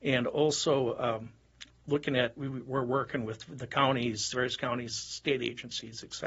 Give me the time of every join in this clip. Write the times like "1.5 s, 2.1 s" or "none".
2.4 s, 4.9 s

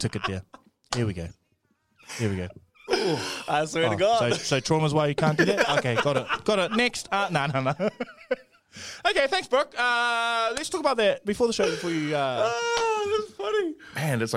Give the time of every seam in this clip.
none

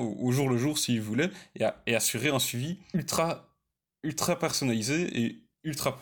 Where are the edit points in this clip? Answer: none

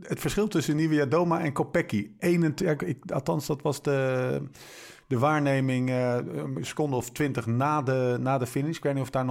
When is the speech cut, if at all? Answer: none

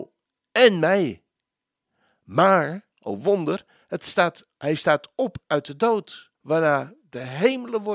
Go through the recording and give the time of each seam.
2.9 s, 4.5 s, 6.4 s

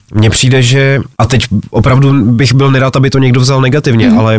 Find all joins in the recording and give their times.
1.1 s

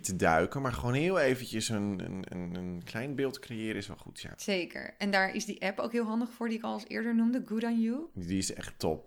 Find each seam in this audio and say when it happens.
none

